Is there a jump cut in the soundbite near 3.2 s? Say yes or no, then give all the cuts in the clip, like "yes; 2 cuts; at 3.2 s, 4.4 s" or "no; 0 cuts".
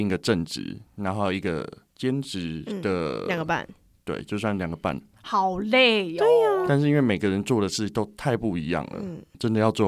no; 1 cut; at 6.7 s